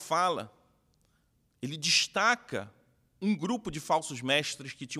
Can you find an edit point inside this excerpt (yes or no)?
no